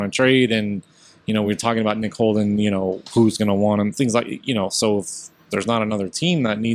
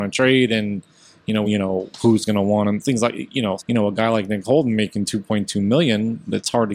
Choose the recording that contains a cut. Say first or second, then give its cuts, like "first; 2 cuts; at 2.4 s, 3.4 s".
second; 2 cuts; at 1.4 s, 3.6 s